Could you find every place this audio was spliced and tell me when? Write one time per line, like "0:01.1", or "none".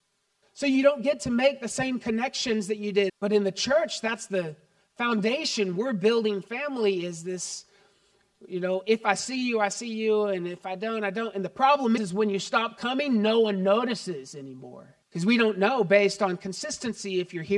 0:03.1
0:12.0
0:15.0